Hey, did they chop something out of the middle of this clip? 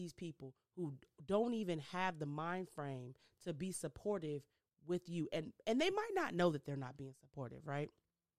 no; 0 cuts

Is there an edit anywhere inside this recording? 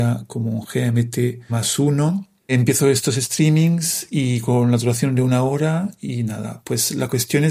no; 0 cuts

